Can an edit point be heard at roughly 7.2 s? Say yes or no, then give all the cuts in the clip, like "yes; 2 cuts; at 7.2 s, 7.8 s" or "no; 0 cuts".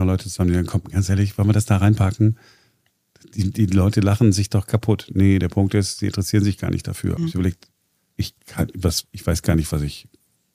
yes; 2 cuts; at 7.2 s, 8.4 s